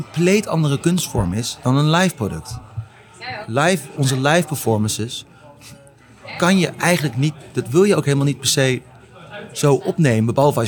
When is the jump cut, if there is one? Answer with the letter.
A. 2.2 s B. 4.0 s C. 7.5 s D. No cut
B